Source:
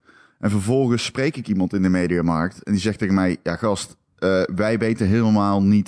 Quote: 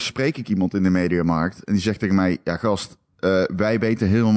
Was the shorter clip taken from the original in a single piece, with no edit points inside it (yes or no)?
yes